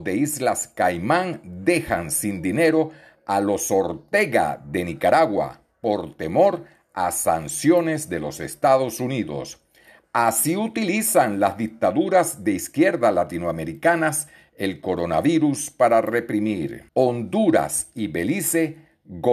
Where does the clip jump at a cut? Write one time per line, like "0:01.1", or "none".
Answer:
0:16.9